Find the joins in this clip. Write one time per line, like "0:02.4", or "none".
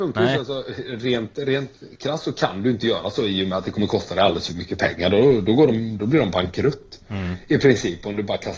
none